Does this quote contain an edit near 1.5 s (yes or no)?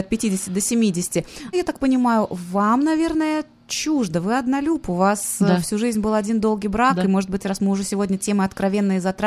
yes